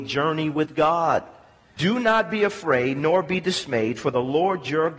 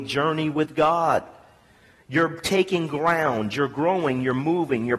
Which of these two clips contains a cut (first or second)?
first